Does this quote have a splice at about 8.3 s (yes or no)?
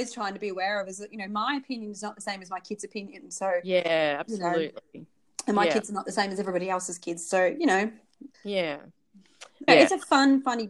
yes